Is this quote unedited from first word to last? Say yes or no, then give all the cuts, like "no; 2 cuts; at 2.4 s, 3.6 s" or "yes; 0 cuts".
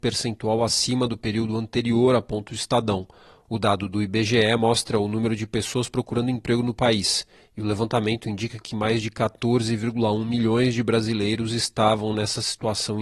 yes; 0 cuts